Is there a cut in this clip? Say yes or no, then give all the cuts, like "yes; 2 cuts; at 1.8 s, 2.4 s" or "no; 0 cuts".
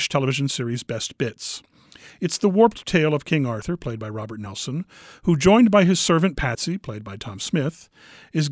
no; 0 cuts